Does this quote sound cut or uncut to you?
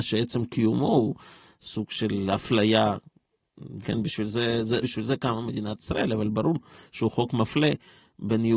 cut